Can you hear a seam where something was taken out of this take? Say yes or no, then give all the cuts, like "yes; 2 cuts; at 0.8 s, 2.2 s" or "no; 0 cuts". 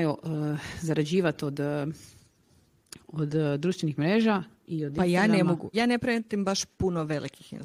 yes; 1 cut; at 5.7 s